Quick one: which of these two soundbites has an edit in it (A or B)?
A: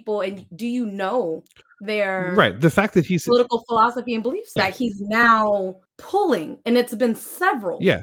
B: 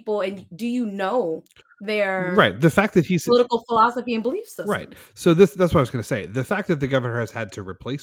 A